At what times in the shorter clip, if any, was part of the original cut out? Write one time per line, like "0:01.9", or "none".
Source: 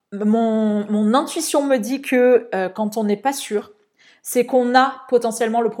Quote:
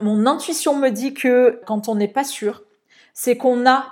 0:01.6